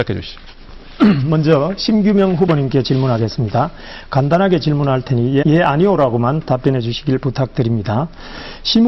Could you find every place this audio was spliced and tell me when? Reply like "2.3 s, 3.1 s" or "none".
5.4 s